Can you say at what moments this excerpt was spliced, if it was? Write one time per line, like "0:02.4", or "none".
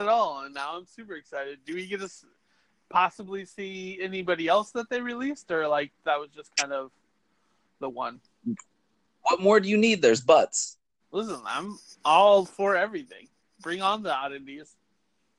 none